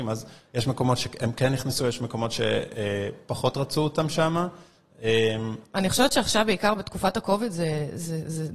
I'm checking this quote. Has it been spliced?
yes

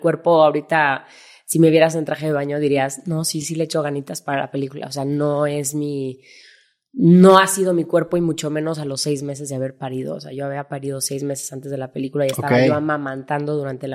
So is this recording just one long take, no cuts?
yes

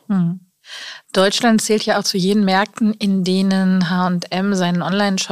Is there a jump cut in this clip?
no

